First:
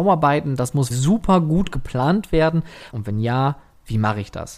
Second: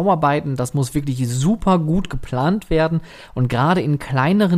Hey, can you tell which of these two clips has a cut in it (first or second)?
first